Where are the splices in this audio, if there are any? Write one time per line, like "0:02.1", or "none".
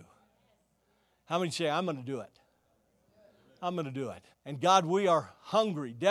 0:04.3